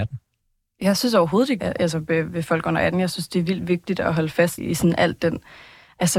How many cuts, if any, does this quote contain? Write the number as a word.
two